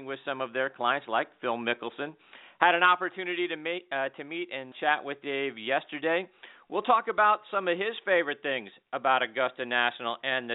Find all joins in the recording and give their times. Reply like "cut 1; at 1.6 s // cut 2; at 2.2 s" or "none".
cut 1; at 4.7 s